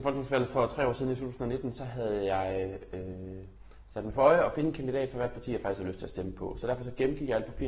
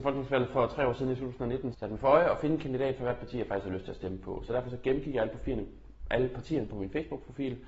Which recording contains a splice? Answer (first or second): second